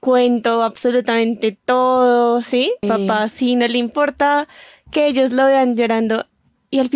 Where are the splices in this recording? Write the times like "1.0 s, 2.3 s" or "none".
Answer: 2.8 s